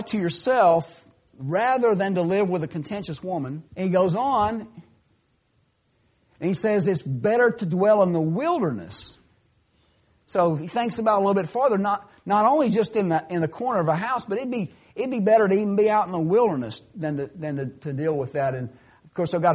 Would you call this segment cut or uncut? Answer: cut